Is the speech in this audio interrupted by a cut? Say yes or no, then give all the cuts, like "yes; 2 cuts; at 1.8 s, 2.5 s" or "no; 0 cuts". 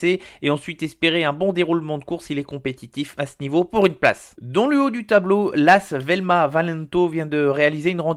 no; 0 cuts